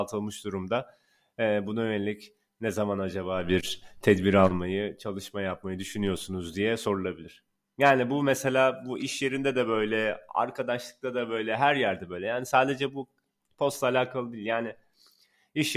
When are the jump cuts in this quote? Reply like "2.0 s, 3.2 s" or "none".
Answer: none